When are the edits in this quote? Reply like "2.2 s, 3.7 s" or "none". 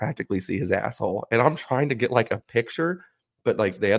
none